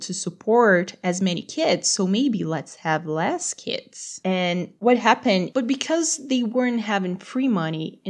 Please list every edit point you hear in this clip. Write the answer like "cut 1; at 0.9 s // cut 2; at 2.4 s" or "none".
cut 1; at 4.2 s // cut 2; at 5.5 s